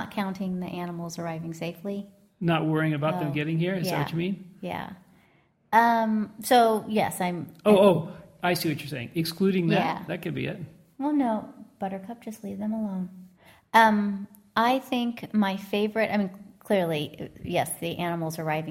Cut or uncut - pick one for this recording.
cut